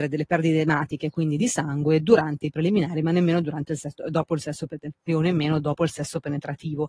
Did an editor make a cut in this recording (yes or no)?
yes